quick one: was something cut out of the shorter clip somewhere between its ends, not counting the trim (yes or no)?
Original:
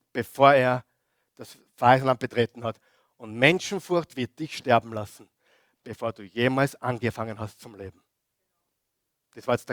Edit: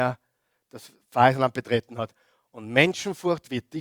no